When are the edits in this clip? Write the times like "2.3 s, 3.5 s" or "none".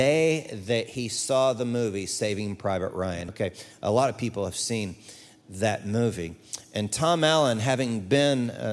3.3 s